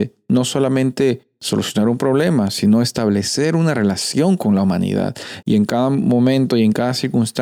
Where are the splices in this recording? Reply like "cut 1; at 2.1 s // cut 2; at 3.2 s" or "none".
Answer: cut 1; at 5.4 s

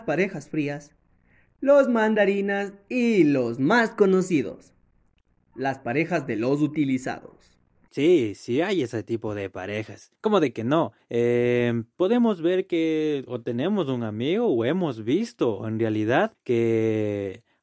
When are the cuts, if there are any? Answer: cut 1; at 7.9 s

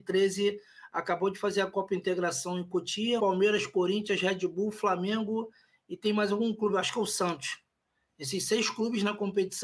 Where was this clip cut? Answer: cut 1; at 3.2 s

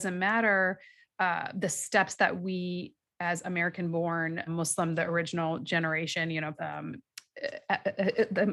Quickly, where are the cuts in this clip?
cut 1; at 4.5 s // cut 2; at 6.5 s

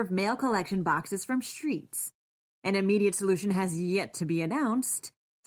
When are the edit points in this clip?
none

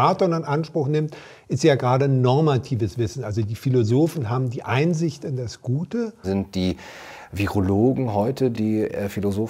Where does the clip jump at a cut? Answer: cut 1; at 6.2 s // cut 2; at 8.5 s

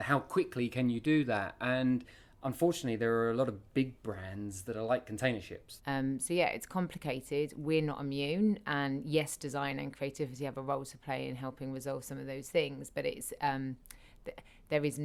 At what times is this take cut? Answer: cut 1; at 5.8 s

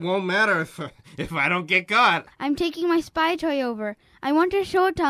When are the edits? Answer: cut 1; at 2.3 s

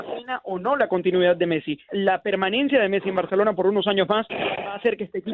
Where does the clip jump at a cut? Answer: cut 1; at 1.9 s

